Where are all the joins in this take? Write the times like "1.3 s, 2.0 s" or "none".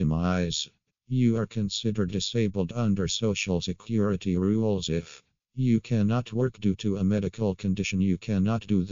0.9 s